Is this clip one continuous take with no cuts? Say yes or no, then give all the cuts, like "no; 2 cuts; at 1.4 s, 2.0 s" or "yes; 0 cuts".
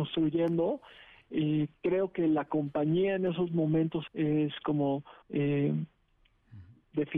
no; 2 cuts; at 4.1 s, 5.2 s